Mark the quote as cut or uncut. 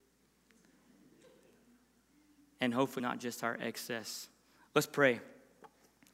cut